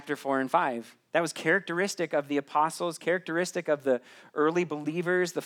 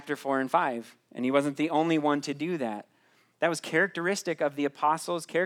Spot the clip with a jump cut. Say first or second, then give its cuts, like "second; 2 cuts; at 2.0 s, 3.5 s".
first; 1 cut; at 1.1 s